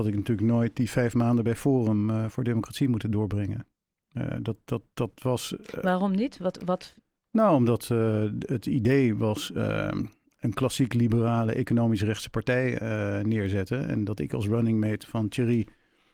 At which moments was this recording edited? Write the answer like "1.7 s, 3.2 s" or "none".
none